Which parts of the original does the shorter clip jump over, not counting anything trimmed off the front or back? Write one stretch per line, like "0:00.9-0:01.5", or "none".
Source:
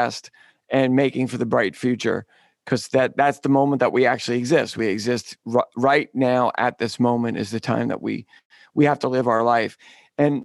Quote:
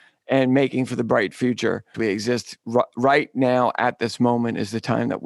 0:02.4-0:04.7